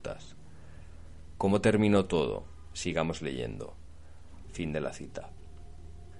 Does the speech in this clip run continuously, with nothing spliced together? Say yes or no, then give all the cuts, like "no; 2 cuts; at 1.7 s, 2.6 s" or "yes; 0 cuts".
no; 1 cut; at 4.4 s